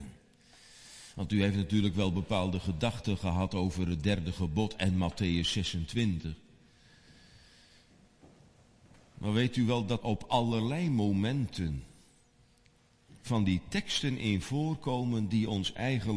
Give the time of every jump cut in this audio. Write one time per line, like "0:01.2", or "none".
0:10.0